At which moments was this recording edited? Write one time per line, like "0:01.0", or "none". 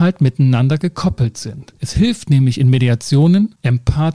0:01.8